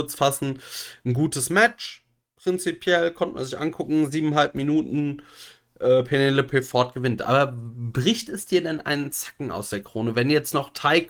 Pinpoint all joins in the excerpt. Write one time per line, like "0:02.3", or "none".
none